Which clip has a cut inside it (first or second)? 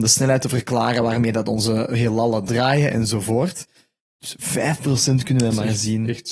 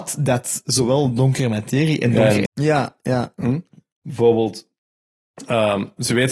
second